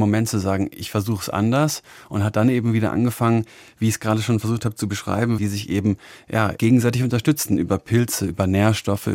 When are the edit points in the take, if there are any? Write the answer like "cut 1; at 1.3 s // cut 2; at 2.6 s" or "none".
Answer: cut 1; at 5.4 s // cut 2; at 6.6 s